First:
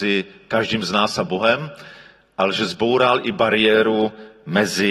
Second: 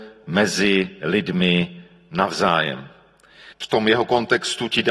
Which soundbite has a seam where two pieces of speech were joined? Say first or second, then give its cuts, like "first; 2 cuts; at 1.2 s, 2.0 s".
second; 1 cut; at 3.5 s